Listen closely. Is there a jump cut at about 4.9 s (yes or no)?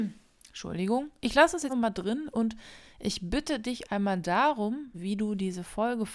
yes